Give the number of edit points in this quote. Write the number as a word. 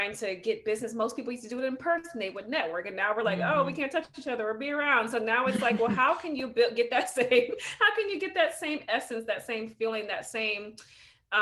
zero